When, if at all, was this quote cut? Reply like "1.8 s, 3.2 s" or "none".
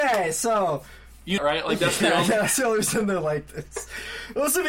1.4 s

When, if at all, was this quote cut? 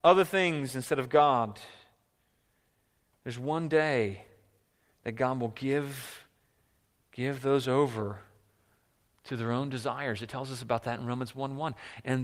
none

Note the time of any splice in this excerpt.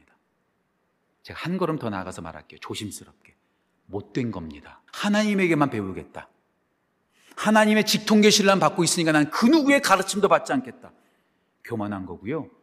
1.1 s, 4.9 s

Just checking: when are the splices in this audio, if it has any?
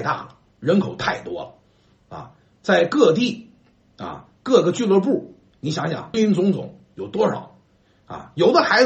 6.1 s

